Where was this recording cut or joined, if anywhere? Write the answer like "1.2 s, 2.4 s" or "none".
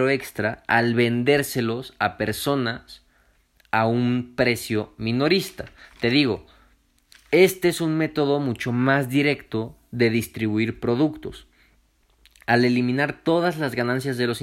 none